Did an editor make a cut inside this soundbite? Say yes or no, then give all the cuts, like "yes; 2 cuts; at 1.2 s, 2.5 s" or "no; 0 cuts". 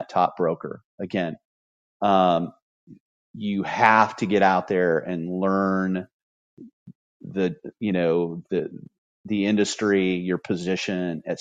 no; 0 cuts